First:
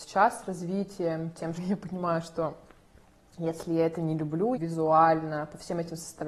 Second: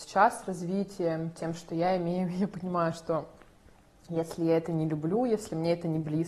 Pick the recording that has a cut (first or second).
first